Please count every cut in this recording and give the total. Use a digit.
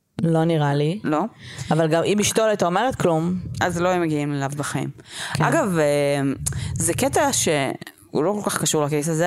0